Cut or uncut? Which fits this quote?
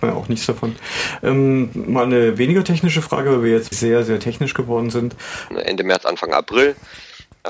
cut